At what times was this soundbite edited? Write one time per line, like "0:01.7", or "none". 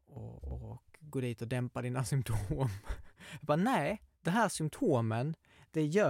0:04.1